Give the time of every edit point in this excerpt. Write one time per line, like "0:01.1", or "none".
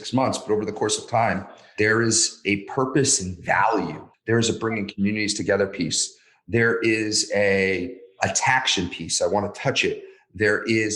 0:04.1